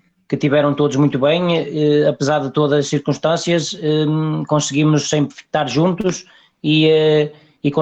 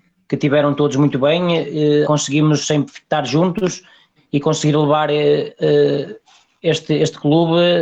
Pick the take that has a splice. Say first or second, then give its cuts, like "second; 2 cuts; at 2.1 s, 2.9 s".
second; 2 cuts; at 2.0 s, 4.2 s